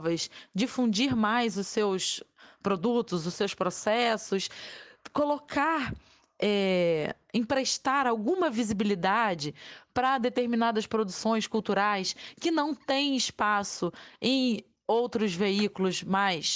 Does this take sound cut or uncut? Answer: uncut